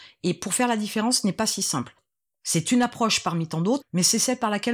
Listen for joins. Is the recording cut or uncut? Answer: cut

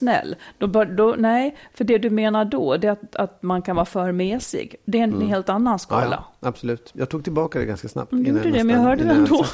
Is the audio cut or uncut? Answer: uncut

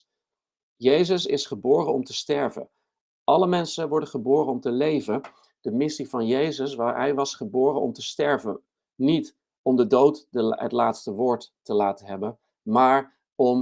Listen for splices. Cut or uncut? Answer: uncut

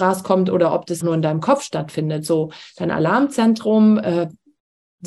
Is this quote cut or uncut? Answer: cut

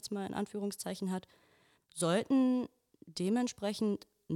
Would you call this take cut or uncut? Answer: cut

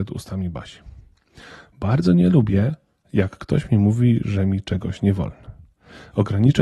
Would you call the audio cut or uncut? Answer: uncut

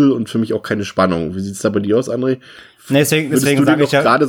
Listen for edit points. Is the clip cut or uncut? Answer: uncut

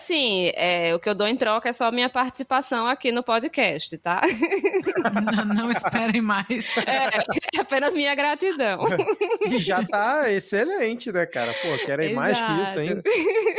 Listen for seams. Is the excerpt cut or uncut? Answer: uncut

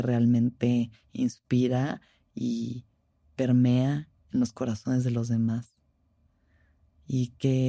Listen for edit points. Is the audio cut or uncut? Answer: uncut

